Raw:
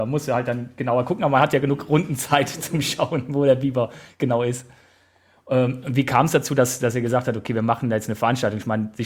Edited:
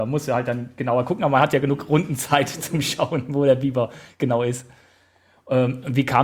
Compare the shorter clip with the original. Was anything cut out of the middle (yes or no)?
no